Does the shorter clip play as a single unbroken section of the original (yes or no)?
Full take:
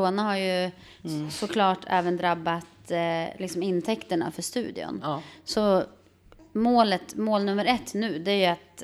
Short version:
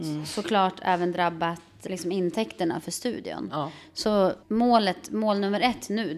no